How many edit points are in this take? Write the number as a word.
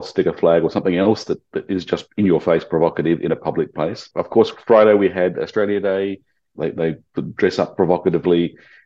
one